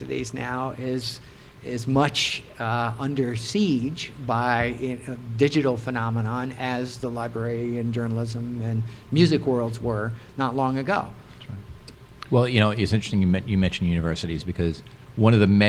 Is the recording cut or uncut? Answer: uncut